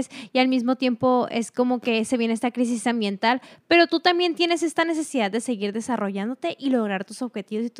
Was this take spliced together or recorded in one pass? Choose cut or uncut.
uncut